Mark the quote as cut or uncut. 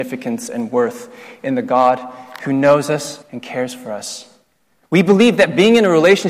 cut